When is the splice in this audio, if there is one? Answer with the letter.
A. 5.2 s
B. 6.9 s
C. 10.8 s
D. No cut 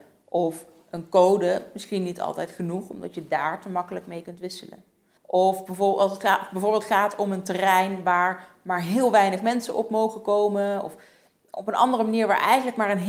A